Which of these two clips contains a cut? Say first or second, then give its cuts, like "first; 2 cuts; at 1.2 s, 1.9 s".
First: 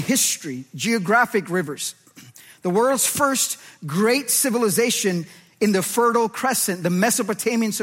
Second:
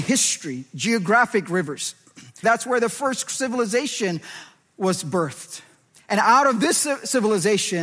second; 1 cut; at 2.4 s